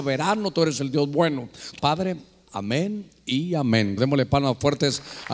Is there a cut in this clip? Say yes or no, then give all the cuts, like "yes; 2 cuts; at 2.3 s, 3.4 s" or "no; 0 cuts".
yes; 2 cuts; at 1.8 s, 4.0 s